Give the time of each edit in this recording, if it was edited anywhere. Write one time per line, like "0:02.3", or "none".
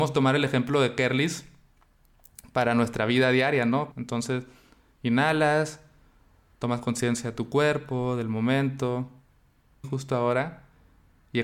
0:03.9
0:09.8